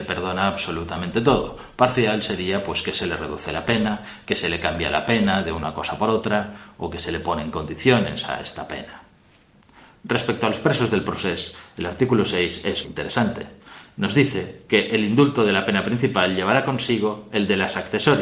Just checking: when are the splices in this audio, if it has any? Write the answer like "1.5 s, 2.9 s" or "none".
12.8 s